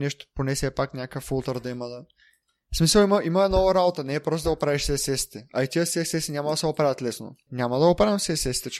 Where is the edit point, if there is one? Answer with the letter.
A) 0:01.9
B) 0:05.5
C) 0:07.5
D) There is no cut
C